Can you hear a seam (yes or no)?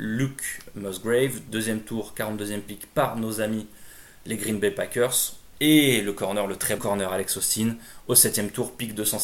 yes